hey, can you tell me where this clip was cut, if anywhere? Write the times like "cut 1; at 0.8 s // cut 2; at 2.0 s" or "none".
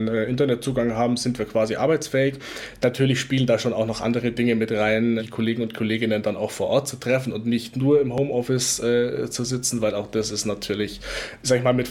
cut 1; at 5.2 s